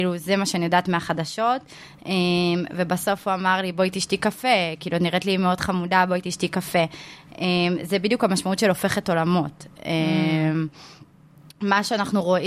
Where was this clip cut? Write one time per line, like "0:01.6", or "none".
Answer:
none